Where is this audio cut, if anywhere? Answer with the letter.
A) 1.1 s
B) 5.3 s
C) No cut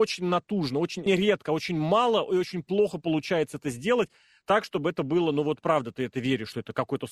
A